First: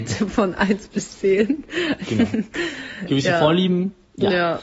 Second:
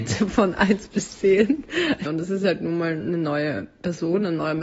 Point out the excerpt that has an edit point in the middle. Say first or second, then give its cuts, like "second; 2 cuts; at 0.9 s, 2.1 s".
second; 1 cut; at 2.1 s